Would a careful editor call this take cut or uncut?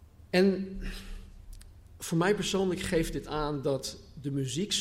uncut